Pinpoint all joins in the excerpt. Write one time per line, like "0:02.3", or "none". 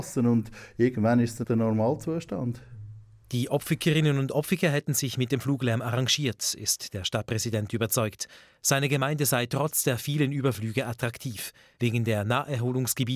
0:01.4

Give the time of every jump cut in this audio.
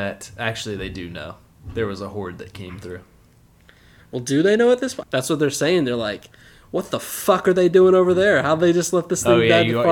0:05.0

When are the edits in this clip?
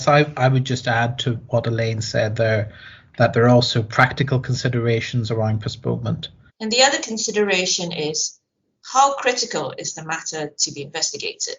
0:06.5

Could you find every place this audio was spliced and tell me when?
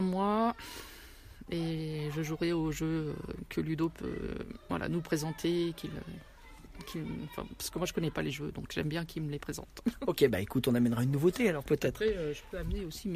none

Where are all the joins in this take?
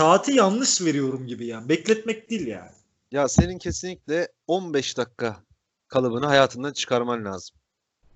none

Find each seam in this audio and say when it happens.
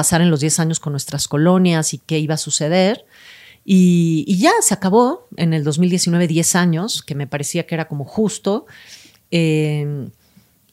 none

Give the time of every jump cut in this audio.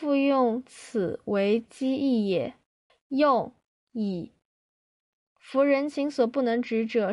0:02.9

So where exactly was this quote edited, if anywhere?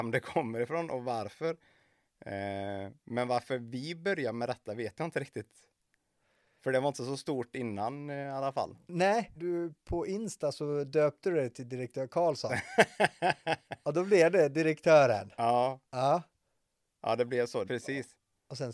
0:09.4
0:17.7

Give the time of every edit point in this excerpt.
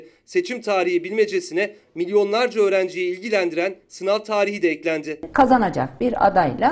none

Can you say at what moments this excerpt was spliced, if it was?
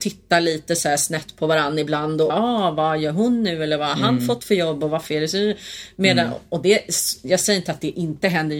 0:02.3

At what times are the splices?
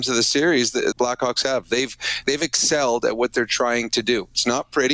0:00.9
0:02.2

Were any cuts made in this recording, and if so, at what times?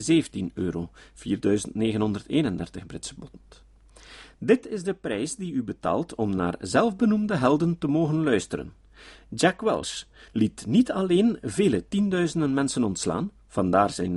0:10.3

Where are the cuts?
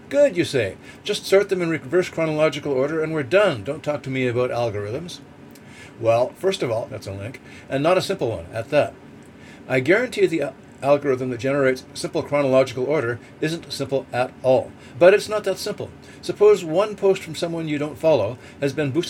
0:06.9
0:09.6
0:14.9

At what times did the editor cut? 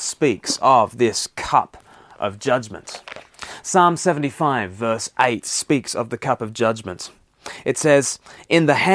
none

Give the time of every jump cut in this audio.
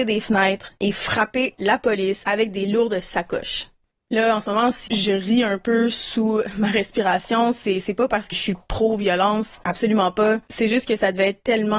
0:04.9
0:08.3

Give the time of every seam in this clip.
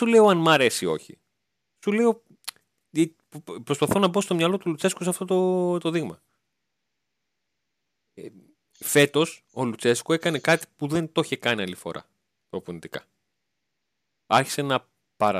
none

